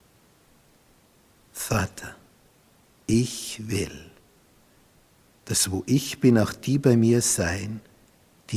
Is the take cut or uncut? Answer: uncut